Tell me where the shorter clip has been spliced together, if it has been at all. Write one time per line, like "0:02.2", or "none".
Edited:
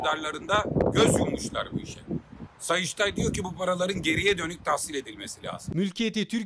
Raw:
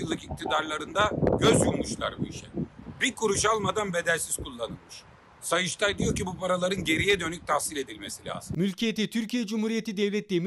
0:02.5